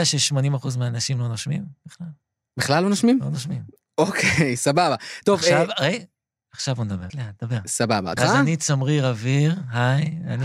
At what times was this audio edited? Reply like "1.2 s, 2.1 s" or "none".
7.1 s, 8.2 s